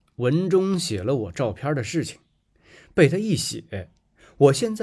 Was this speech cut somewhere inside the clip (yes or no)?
no